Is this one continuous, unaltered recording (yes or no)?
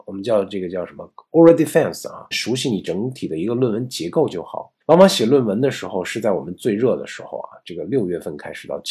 no